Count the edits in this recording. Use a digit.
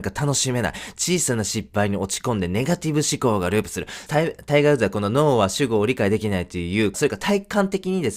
2